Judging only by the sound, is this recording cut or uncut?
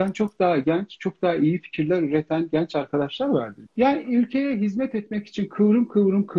cut